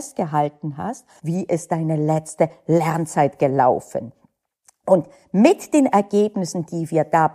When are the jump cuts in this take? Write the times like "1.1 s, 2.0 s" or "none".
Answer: 1.2 s